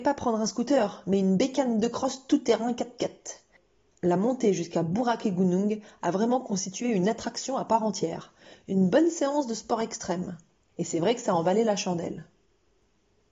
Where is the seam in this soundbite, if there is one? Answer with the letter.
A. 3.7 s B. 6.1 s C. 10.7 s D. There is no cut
C